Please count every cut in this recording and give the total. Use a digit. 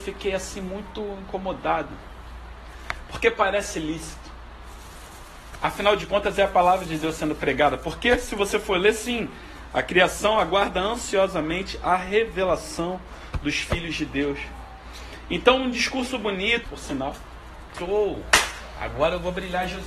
2